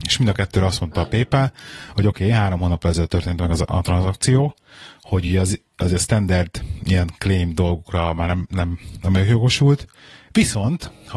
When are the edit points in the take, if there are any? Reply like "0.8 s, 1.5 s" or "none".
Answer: none